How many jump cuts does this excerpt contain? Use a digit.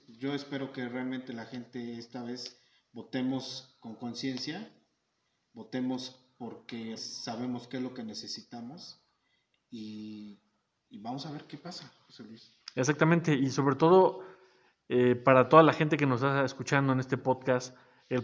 1